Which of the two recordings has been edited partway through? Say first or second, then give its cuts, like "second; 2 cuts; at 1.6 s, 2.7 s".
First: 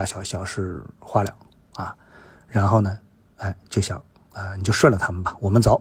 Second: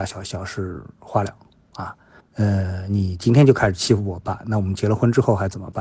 second; 1 cut; at 2.2 s